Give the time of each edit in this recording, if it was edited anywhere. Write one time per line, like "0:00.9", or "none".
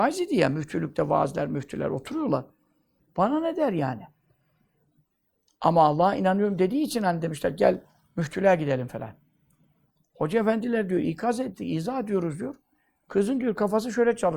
0:03.0